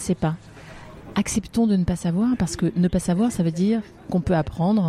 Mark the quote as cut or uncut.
uncut